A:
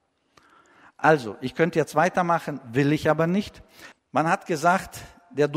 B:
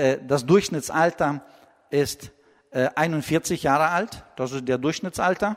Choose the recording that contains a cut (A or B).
A